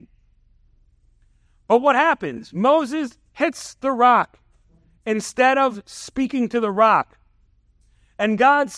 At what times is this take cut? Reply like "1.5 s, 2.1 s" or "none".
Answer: none